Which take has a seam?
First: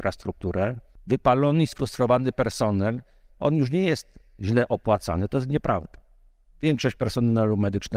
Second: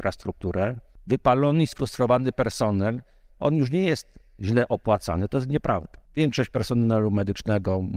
second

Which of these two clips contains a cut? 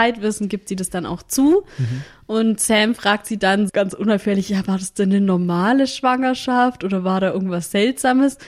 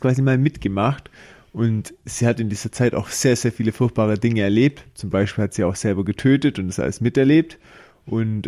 first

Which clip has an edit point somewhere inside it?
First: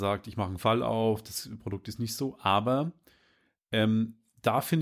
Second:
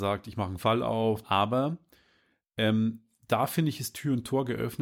second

